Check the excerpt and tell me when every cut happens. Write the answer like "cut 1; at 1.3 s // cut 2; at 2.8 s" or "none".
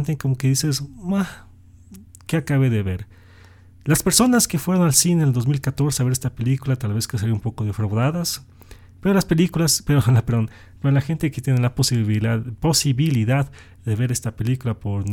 none